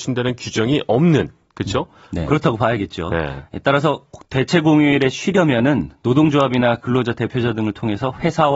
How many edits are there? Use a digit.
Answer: 1